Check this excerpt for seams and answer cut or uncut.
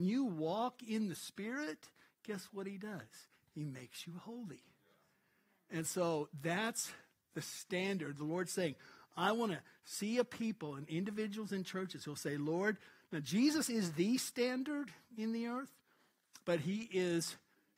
uncut